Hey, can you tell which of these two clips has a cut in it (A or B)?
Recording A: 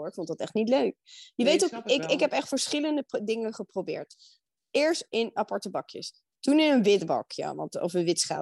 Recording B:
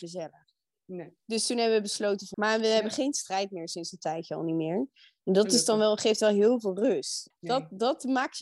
B